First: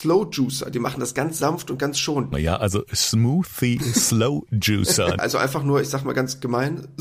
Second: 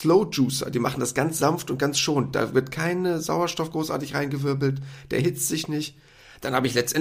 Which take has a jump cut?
first; 2 cuts; at 2.3 s, 5.2 s

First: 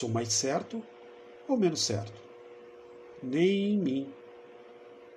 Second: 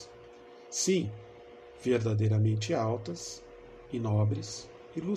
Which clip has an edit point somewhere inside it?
first; 1 cut; at 3.2 s

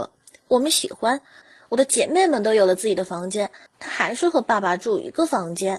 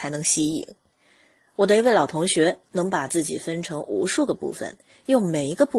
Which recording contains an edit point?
first; 2 cuts; at 1.4 s, 3.7 s

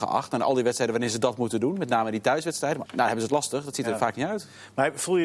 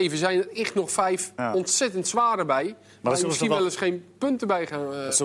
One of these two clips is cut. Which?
first; 1 cut; at 2.9 s

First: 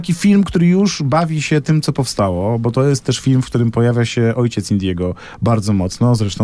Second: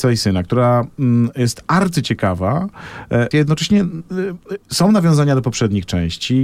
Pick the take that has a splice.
second; 1 cut; at 3.3 s

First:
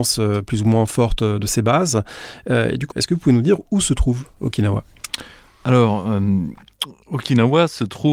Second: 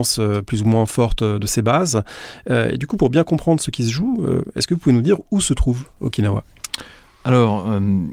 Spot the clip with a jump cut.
first; 1 cut; at 2.9 s

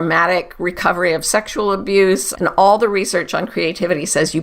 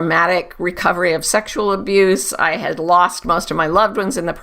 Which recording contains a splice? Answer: first; 1 cut; at 2.3 s

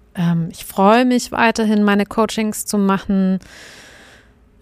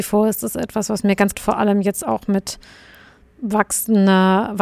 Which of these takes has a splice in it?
second; 1 cut; at 1.3 s

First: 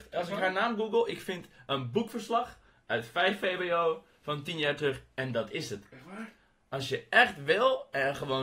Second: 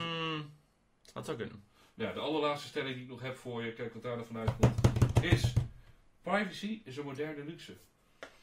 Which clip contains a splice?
second; 1 cut; at 1.0 s

